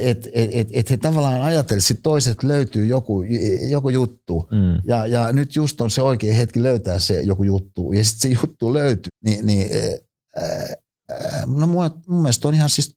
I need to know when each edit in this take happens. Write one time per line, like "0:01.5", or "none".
0:09.1
0:11.1